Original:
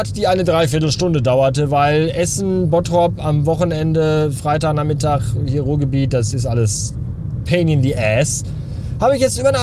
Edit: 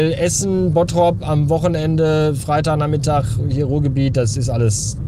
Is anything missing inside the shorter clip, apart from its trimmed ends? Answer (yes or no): no